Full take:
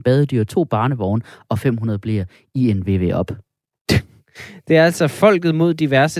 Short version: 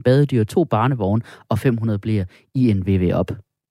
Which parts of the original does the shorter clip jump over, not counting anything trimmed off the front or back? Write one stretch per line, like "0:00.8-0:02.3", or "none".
none